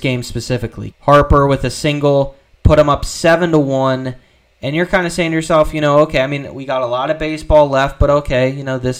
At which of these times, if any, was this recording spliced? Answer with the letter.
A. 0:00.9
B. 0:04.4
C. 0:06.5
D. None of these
A